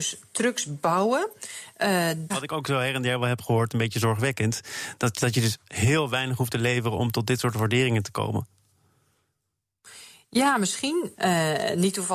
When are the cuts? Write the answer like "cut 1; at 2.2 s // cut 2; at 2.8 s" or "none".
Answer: cut 1; at 2.3 s // cut 2; at 11.1 s